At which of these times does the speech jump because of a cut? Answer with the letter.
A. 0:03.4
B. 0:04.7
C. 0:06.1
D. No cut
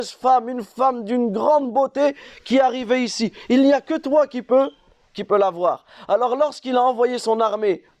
D